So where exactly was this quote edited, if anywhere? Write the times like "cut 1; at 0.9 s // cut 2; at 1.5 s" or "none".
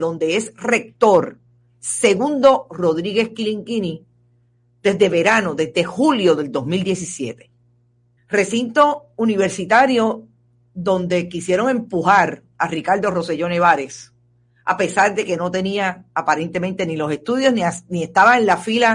cut 1; at 8.2 s